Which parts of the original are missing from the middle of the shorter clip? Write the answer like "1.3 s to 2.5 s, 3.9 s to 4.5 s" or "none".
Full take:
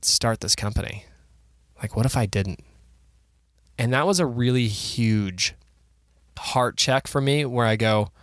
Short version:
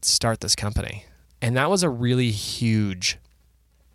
1.2 s to 3.6 s